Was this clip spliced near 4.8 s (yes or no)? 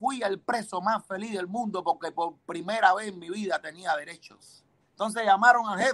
yes